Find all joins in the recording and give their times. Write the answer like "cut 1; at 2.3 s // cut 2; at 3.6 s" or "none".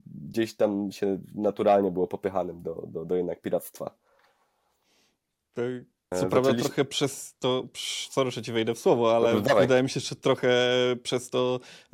cut 1; at 6.1 s